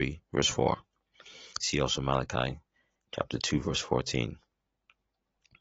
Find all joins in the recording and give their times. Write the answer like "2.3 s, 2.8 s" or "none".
1.6 s

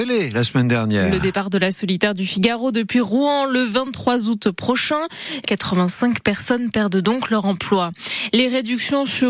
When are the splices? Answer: 5.4 s

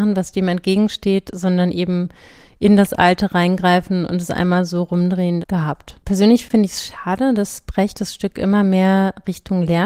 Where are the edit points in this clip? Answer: 5.4 s

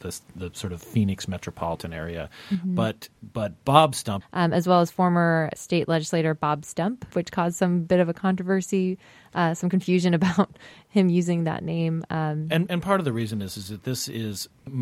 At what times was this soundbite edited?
4.2 s, 7.1 s

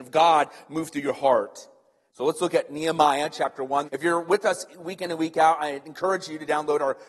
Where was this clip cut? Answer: 2.1 s, 3.9 s

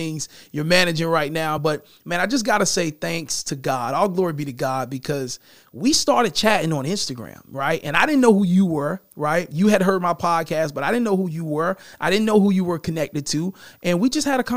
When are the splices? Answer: none

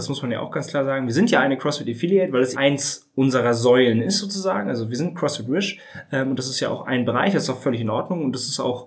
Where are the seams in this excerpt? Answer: 2.5 s

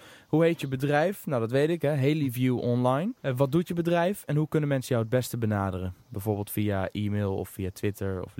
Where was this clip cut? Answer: 3.2 s

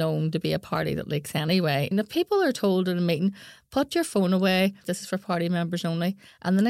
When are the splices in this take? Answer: 1.9 s, 4.8 s

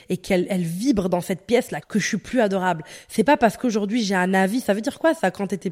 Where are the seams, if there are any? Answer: 1.8 s

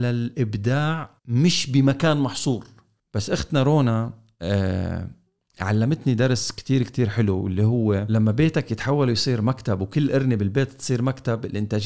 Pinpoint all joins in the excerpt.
1.2 s

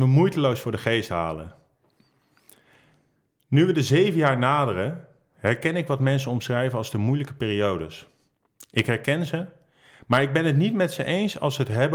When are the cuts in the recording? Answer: none

